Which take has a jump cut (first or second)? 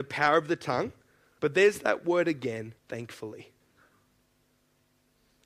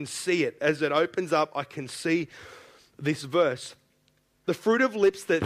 first